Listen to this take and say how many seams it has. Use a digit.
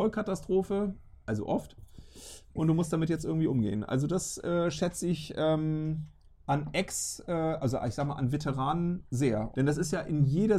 1